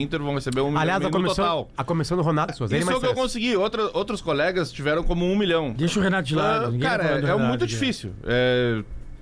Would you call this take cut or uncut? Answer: cut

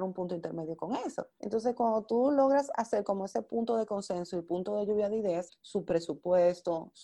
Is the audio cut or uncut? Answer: cut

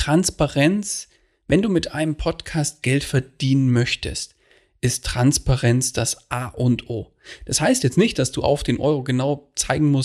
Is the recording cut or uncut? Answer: uncut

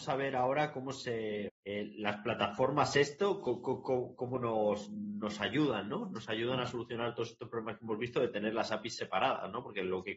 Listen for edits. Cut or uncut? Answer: cut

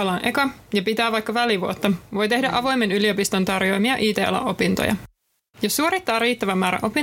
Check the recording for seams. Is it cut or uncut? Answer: uncut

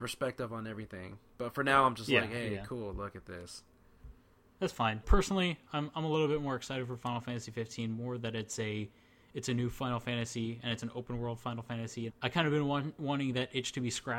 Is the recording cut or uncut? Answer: cut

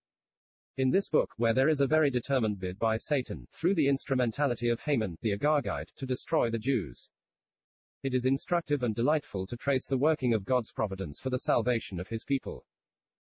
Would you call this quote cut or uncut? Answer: uncut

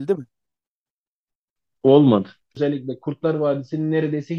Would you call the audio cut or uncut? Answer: cut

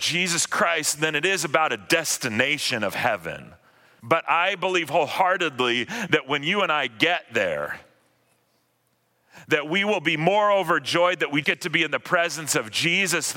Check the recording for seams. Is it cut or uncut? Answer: cut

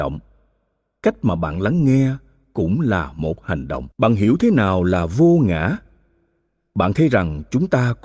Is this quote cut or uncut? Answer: cut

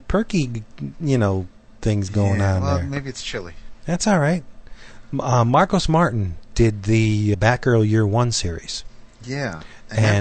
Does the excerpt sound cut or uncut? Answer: cut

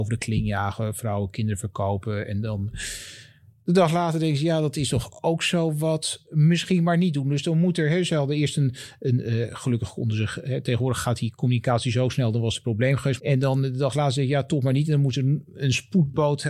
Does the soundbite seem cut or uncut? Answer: cut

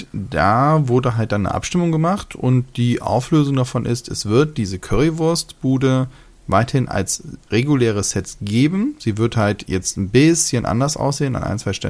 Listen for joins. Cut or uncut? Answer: uncut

